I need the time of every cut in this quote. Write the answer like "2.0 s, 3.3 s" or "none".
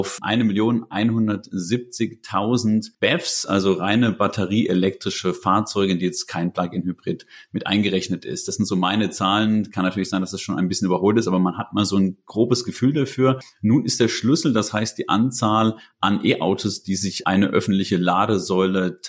none